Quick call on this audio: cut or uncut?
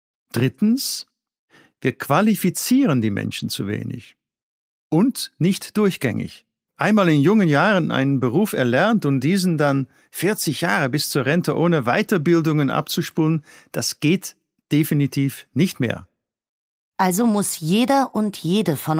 uncut